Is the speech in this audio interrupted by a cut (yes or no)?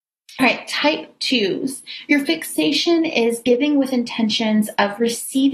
no